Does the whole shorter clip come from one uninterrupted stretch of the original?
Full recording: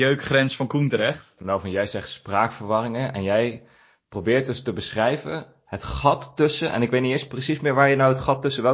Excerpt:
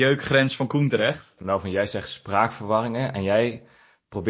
yes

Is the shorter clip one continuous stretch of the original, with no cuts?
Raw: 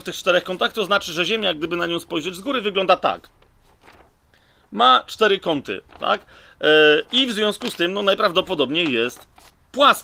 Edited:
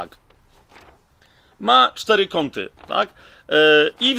yes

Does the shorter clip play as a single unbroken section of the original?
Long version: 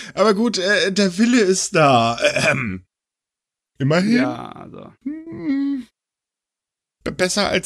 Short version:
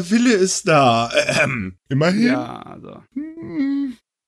no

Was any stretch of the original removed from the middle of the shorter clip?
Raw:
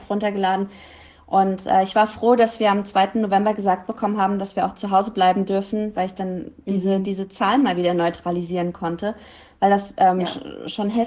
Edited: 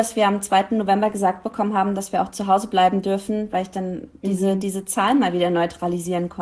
no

